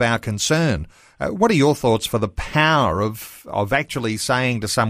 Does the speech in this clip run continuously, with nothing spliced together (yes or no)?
yes